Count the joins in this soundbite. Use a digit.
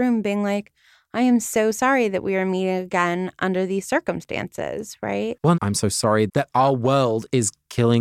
1